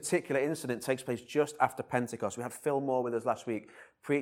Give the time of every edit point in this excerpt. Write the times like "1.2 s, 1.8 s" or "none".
none